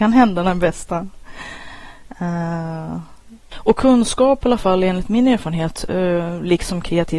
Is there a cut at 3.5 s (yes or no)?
yes